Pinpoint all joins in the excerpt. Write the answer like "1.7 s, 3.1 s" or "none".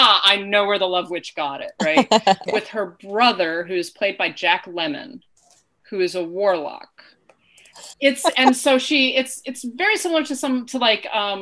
2.5 s, 7.9 s